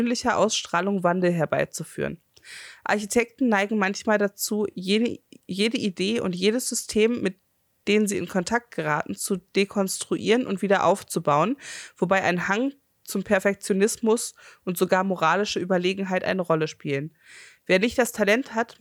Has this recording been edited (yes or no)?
no